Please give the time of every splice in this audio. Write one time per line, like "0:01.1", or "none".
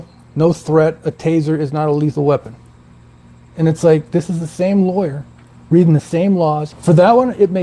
0:06.7